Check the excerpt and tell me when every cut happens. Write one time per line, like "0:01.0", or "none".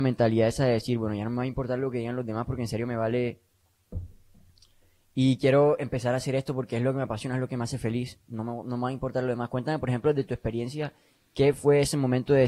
none

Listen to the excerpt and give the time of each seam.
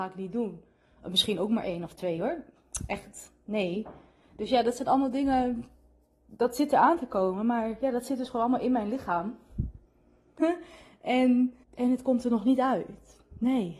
0:10.4
0:11.6

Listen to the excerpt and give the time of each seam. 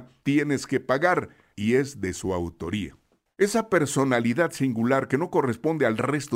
0:03.3

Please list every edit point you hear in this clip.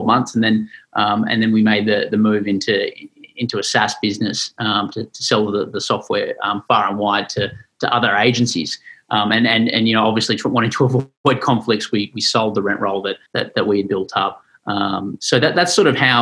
0:13.3

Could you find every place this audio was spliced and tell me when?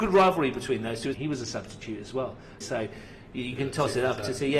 0:01.1
0:02.6

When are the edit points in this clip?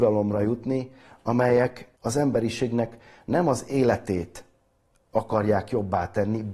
0:01.9

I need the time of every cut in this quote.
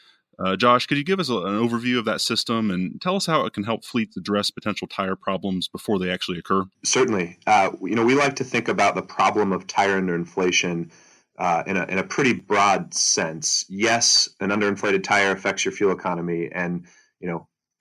none

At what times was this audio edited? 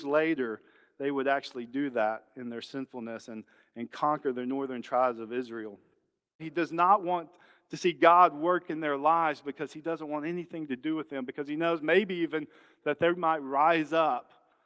0:06.4

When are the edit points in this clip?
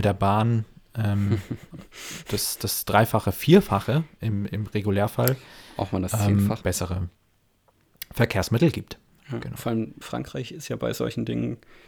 0:06.6
0:10.0

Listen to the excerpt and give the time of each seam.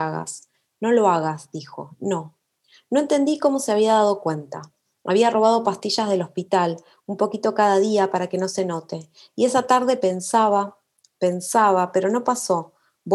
none

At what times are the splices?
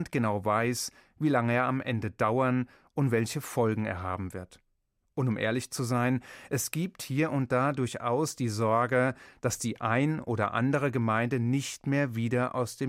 none

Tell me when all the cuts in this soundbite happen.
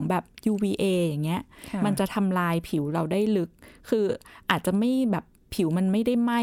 none

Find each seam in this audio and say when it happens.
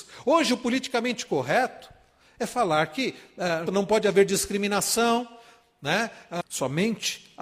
0:03.7
0:06.4

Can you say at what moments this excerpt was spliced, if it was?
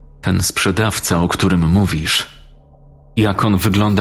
none

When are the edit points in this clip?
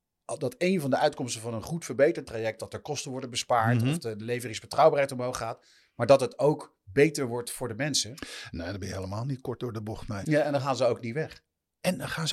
0:02.6
0:10.2

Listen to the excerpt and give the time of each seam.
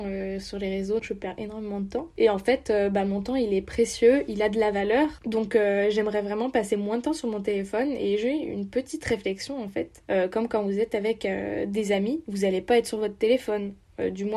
0:01.0

